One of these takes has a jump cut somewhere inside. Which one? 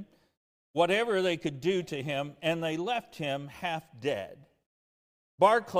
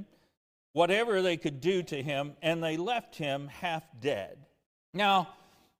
second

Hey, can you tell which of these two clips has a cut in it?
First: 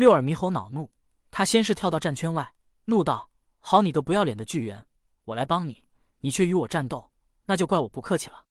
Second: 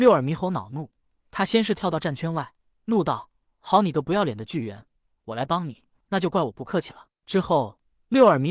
second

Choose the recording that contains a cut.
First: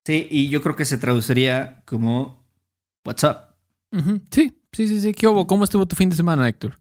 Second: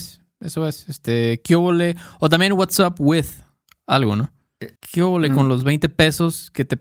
second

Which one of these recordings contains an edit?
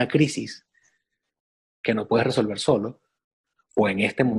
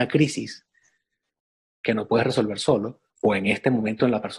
second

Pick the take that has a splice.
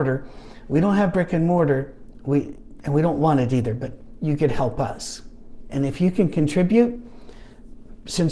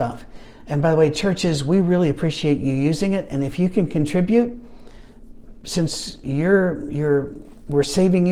first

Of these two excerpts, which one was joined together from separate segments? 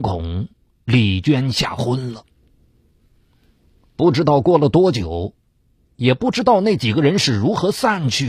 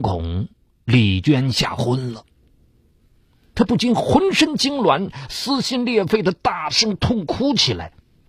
second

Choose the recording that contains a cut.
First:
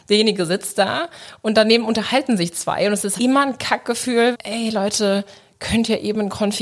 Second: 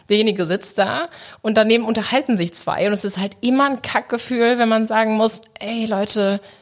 first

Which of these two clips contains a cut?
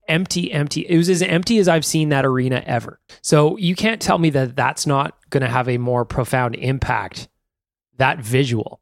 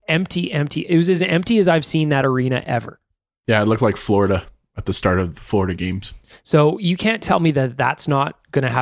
first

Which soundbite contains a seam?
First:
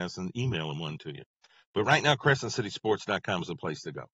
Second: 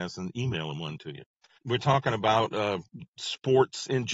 second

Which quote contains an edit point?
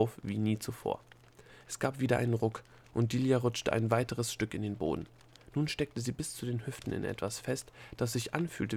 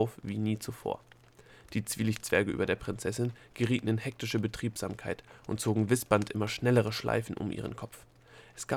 first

